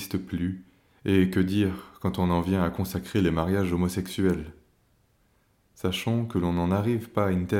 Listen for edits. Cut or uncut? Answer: uncut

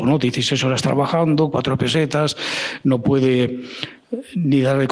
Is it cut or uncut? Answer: uncut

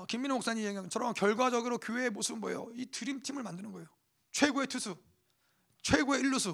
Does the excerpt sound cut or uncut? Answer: uncut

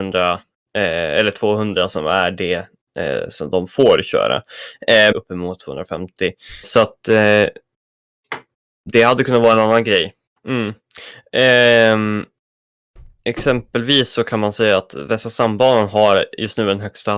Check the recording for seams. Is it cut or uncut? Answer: cut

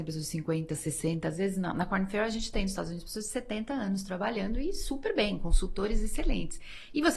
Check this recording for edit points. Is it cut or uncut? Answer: uncut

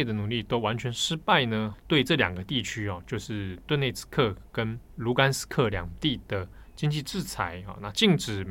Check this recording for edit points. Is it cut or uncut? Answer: cut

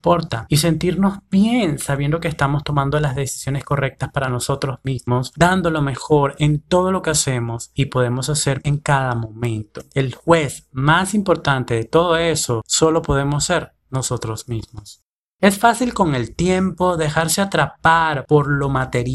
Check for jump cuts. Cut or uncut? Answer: uncut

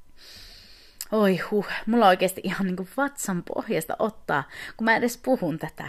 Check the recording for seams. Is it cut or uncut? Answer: uncut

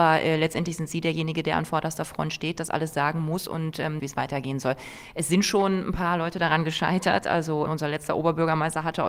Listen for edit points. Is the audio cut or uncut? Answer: cut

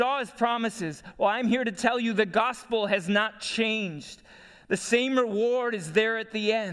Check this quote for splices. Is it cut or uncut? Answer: uncut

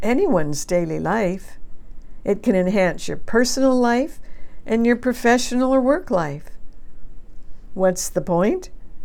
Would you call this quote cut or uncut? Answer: cut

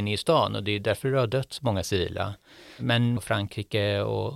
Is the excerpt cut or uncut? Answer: cut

